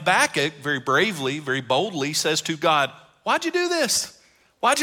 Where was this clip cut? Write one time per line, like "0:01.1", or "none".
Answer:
none